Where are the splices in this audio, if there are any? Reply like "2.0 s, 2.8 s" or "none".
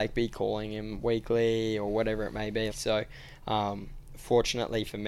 2.7 s